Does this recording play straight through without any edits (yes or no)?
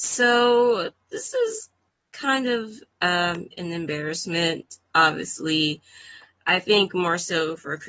yes